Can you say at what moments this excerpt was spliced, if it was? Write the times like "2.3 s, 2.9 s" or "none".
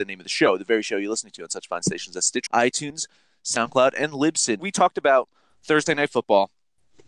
2.5 s, 4.6 s